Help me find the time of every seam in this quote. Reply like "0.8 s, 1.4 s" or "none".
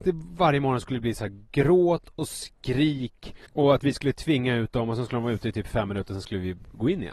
3.5 s